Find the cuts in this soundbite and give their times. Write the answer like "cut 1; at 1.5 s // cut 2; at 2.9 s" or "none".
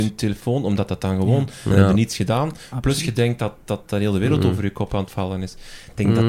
cut 1; at 1.7 s